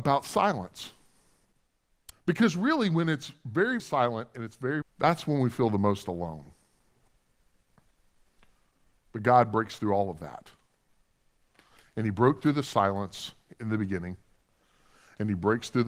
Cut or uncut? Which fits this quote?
cut